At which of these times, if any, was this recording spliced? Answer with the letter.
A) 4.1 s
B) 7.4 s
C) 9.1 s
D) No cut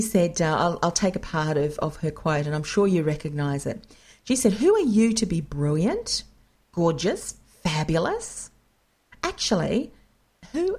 B